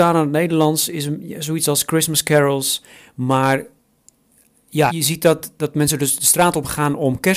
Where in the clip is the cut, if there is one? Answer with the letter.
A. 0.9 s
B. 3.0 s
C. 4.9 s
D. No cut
C